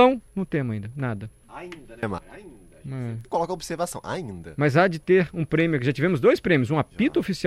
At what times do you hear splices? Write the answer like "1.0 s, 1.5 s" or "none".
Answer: none